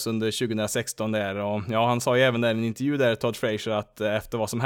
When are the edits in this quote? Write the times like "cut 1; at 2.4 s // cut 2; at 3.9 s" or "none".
none